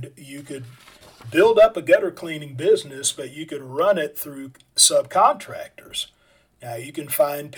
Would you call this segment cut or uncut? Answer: uncut